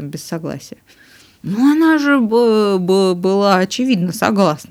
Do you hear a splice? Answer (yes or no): no